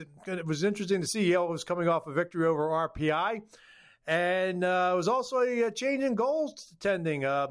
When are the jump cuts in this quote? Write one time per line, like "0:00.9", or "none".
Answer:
none

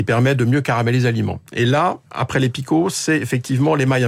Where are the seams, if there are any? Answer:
0:02.1

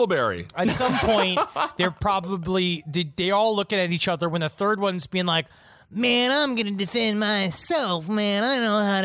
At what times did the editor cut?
none

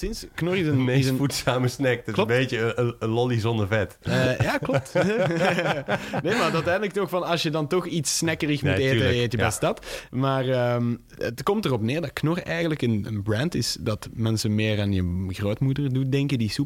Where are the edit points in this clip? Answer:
none

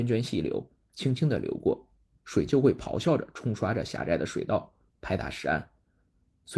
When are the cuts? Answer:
0:02.2

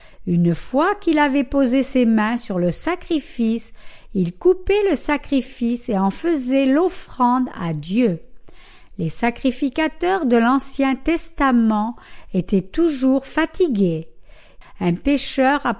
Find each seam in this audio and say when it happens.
0:14.6

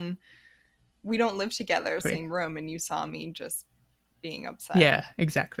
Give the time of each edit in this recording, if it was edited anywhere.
0:02.0

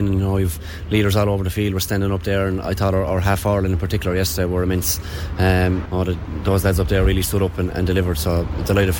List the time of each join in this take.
0:05.9
0:07.7

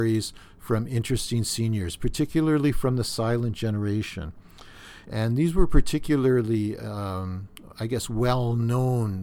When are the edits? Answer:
0:05.0

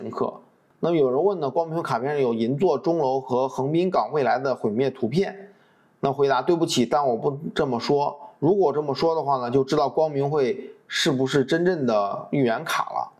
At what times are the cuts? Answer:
none

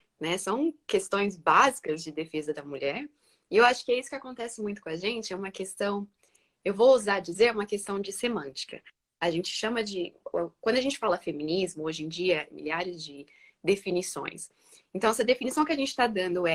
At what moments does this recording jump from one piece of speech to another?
0:12.5

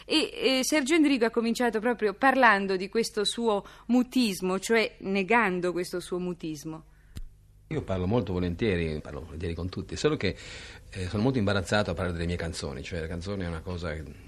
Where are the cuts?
0:09.0

